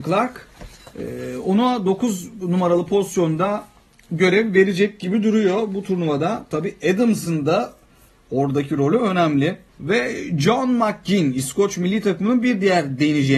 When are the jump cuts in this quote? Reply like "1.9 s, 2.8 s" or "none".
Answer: 9.7 s